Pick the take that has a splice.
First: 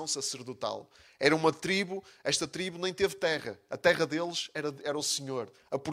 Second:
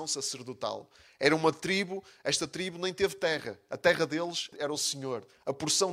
second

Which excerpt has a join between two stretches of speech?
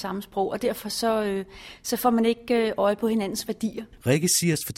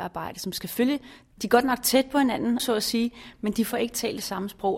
second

